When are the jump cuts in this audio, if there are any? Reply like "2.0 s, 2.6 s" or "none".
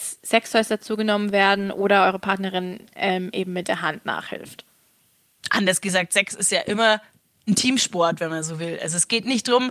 none